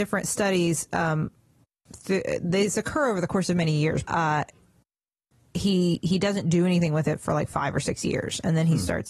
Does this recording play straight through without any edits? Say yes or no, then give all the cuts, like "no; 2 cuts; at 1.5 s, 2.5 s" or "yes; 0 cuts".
no; 1 cut; at 4.0 s